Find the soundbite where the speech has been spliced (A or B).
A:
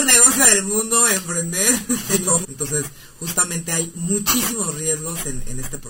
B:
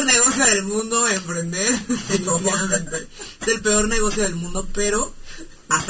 A